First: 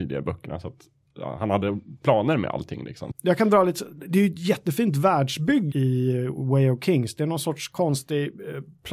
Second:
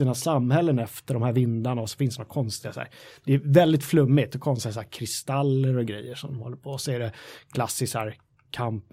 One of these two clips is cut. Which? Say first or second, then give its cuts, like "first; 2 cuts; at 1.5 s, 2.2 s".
first; 2 cuts; at 3.1 s, 5.7 s